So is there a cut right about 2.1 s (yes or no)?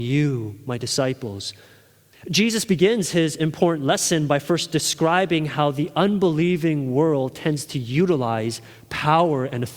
yes